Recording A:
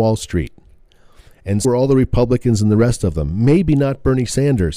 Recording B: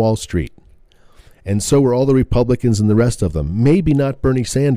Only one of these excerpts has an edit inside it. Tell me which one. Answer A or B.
A